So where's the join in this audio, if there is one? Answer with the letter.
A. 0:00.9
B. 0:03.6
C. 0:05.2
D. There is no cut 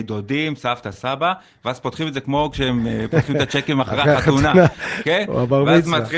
D